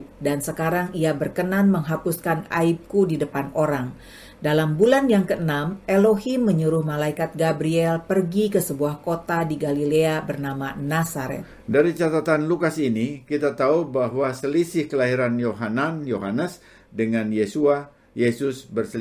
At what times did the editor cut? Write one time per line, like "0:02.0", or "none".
none

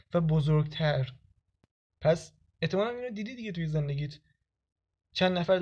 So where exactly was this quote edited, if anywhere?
none

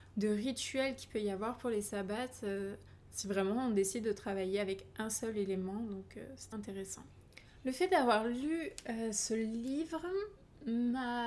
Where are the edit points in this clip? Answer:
0:06.5

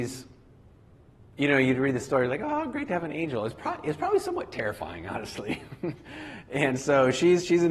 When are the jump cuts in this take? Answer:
none

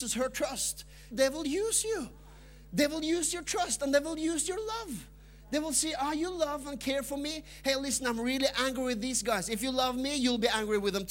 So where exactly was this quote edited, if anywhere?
0:01.1

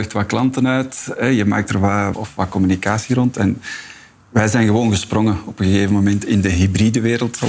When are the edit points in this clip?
0:02.1

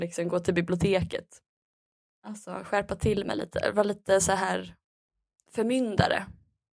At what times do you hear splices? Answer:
none

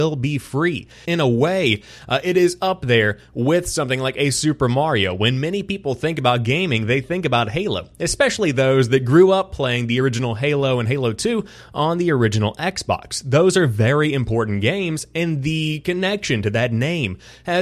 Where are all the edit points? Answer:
0:01.0

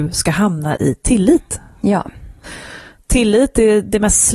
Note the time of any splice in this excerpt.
none

